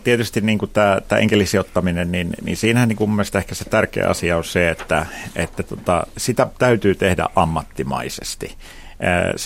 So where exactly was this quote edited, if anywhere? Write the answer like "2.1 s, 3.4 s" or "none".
none